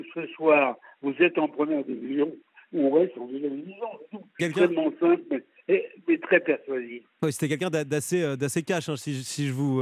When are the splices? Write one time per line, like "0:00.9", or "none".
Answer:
0:04.4